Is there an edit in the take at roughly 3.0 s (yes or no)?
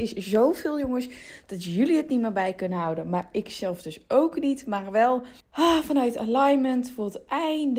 no